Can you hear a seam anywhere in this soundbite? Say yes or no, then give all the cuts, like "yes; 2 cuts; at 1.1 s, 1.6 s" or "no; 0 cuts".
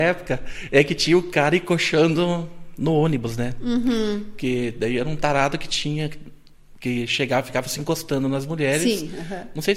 no; 0 cuts